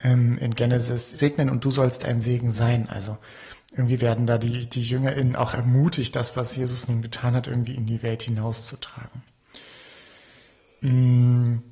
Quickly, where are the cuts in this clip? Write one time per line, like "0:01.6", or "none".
0:01.2